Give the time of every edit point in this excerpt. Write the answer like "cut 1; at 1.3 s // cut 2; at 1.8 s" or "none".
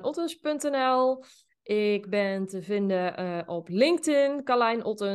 none